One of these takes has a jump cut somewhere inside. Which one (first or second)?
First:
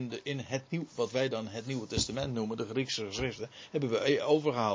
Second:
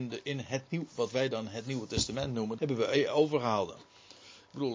second